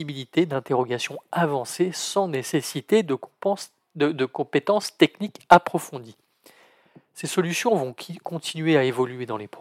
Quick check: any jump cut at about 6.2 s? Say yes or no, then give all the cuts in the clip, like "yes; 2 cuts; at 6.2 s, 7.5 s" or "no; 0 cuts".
no; 0 cuts